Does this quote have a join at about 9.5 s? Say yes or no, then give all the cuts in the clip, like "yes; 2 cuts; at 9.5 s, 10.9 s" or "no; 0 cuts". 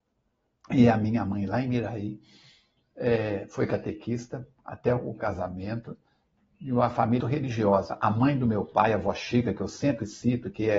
no; 1 cut; at 7.2 s